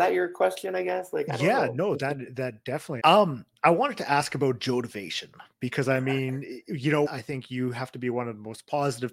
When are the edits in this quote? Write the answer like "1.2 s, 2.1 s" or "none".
3.0 s, 7.1 s

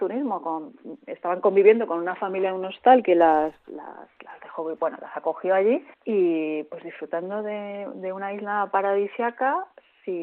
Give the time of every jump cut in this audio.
5.9 s

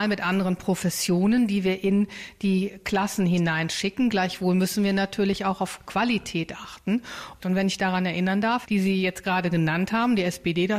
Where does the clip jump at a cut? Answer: 7.4 s, 8.6 s

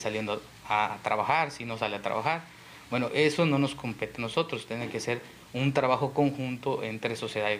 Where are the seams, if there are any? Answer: none

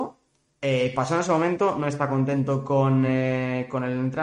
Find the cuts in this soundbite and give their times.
none

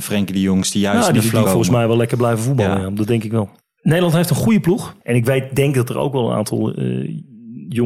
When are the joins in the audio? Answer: 1.4 s, 5.0 s

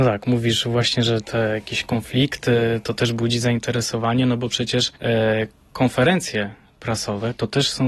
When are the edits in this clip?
5.0 s

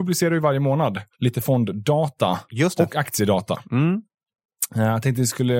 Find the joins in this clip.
1.1 s

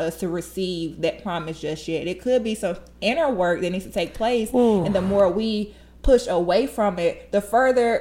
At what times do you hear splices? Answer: none

